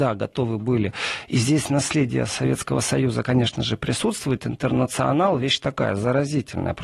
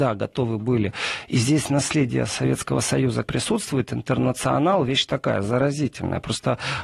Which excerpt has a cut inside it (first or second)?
second